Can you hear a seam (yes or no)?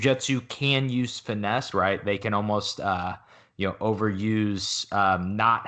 yes